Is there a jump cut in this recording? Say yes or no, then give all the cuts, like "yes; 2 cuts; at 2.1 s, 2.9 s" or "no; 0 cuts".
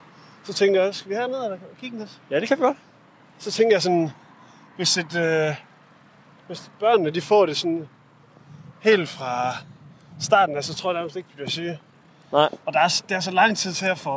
no; 0 cuts